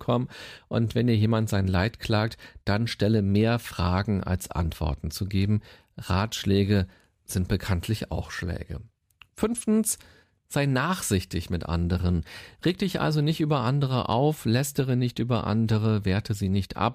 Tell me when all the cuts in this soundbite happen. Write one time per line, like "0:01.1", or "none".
none